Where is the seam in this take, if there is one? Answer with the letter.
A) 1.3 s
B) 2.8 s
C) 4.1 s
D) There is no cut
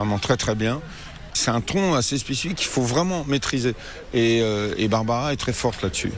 A